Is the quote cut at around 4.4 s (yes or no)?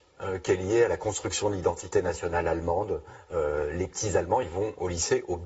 no